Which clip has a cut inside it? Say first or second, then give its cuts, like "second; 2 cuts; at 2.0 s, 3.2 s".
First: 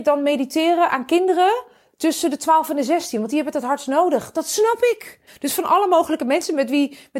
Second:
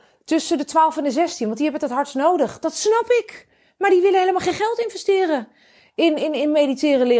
first; 1 cut; at 5.3 s